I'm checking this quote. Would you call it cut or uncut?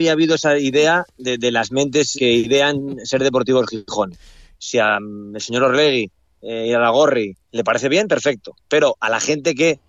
cut